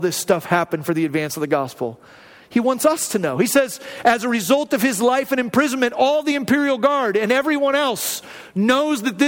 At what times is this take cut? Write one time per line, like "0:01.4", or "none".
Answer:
none